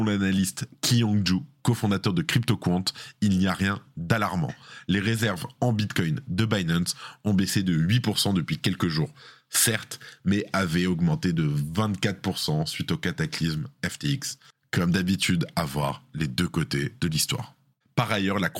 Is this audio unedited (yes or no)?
yes